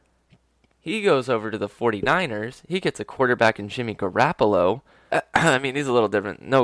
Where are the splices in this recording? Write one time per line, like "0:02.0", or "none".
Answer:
0:05.1